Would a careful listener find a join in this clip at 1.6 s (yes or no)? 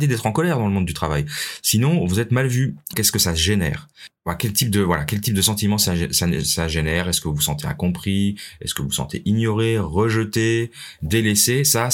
no